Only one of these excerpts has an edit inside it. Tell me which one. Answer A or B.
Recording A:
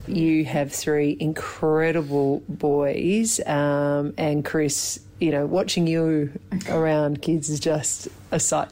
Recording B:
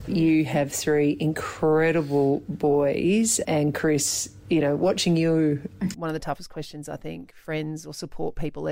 B